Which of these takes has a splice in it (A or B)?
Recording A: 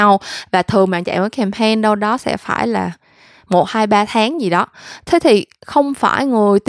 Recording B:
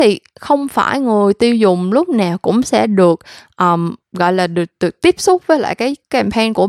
B